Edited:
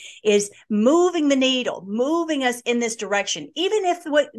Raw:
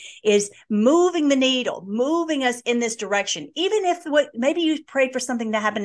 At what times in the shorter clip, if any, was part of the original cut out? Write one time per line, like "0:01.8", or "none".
none